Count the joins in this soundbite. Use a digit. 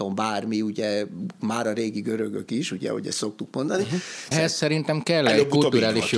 1